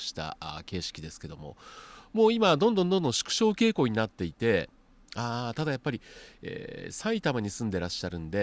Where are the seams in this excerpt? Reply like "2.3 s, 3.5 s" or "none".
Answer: none